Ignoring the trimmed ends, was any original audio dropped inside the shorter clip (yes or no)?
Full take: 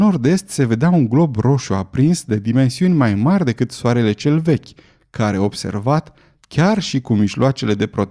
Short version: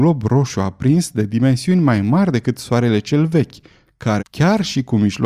yes